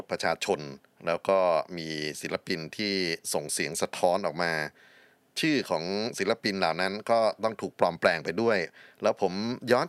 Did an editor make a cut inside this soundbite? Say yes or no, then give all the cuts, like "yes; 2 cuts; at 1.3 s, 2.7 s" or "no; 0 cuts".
no; 0 cuts